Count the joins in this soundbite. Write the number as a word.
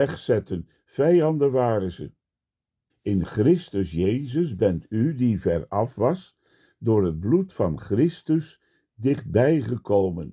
one